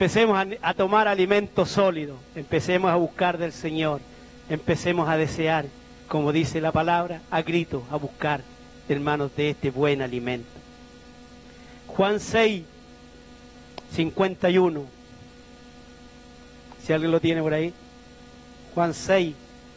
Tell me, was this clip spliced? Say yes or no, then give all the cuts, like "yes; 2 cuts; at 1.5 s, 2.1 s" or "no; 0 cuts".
no; 0 cuts